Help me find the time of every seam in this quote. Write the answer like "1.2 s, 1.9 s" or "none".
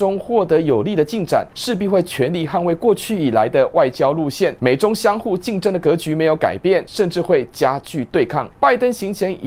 4.6 s